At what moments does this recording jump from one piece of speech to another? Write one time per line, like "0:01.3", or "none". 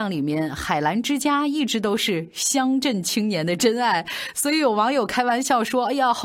none